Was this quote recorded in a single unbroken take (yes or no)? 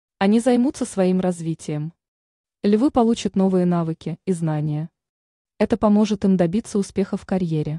yes